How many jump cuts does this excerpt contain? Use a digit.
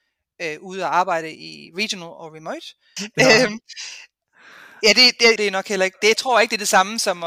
2